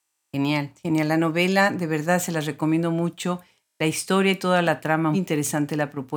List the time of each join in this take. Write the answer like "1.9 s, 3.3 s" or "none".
5.1 s